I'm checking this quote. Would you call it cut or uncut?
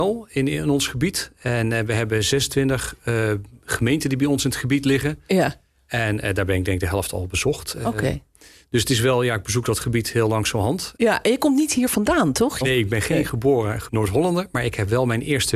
cut